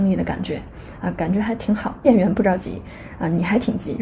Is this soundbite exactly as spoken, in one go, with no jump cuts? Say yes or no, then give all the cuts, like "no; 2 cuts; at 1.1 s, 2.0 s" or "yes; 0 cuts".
yes; 0 cuts